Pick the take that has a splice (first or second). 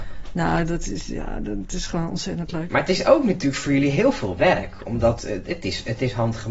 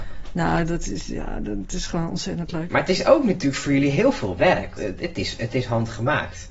second